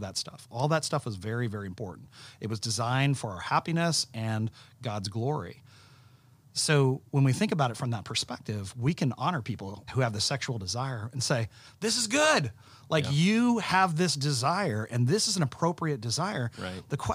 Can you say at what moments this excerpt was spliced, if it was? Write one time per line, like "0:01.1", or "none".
0:09.9